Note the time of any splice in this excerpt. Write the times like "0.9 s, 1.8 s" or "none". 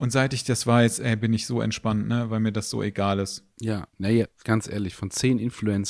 4.4 s